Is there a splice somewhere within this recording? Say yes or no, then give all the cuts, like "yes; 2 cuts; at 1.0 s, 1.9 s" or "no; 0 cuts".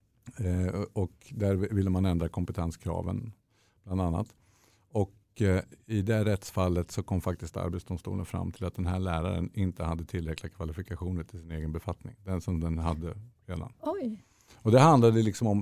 no; 0 cuts